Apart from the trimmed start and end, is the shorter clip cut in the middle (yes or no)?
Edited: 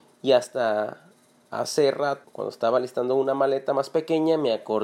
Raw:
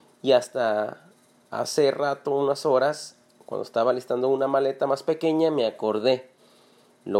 yes